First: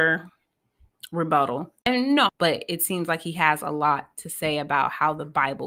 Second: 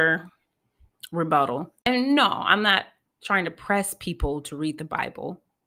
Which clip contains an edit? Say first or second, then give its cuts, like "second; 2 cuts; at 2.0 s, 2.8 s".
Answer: first; 1 cut; at 2.3 s